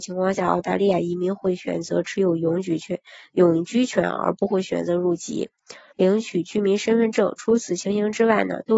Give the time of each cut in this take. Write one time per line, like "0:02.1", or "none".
0:05.9